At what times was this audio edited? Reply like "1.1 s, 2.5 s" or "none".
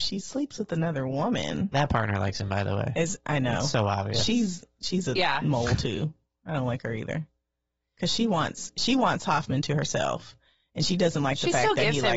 none